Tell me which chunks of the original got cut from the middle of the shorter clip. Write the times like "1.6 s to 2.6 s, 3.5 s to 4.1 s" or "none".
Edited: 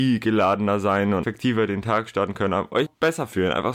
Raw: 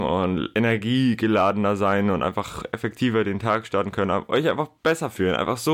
2.2 s to 2.8 s, 4.4 s to 4.7 s